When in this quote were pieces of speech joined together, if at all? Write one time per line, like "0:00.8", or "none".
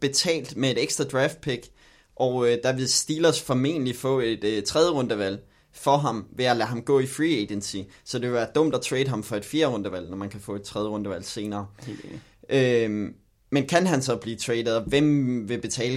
none